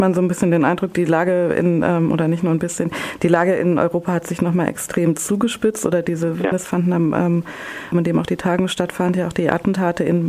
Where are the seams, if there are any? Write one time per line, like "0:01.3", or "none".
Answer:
0:06.5
0:07.9